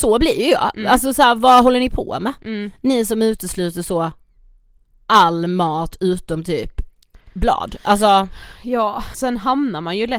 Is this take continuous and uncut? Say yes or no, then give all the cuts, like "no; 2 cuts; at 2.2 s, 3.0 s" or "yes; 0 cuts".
no; 1 cut; at 9.1 s